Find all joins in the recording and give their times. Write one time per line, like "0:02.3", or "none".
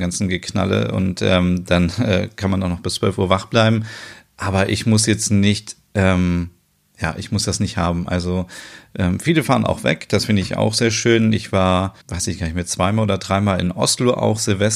0:12.0